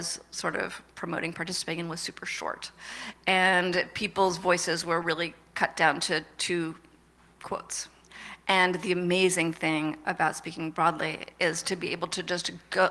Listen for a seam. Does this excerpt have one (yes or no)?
no